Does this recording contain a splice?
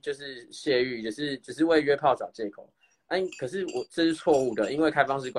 no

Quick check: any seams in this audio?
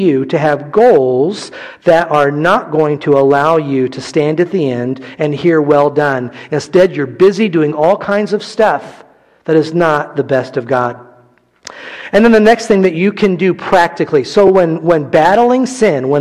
no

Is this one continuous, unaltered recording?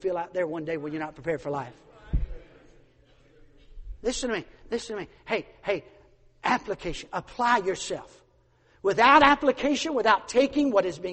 yes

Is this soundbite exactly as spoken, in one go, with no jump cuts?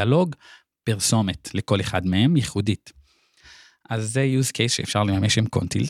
yes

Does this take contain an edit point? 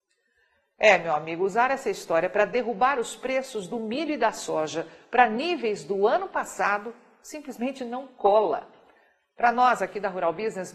no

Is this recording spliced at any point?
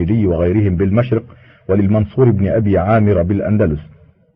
no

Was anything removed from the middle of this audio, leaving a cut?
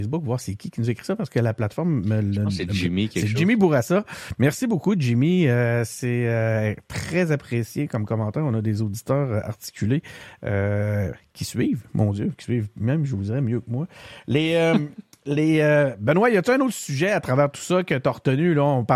no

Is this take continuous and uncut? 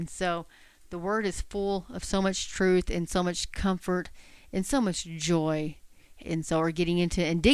no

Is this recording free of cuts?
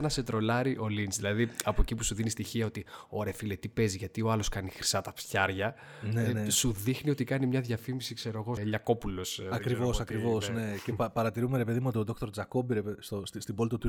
no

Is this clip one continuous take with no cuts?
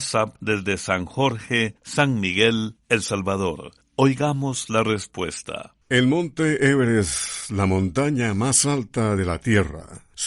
no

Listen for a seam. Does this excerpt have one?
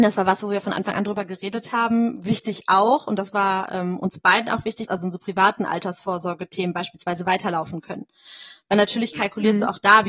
yes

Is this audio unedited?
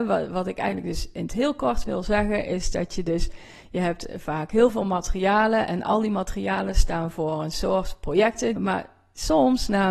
no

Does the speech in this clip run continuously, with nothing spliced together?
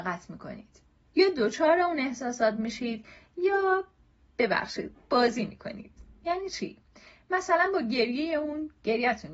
yes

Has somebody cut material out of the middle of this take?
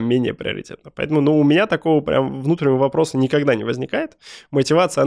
no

